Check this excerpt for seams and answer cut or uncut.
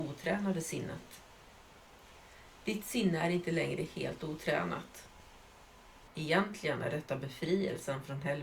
cut